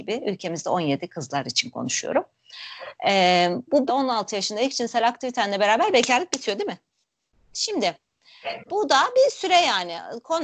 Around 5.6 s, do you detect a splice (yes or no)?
no